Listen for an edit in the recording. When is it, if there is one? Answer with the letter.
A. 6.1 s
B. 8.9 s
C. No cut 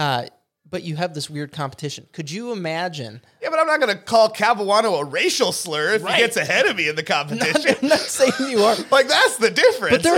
C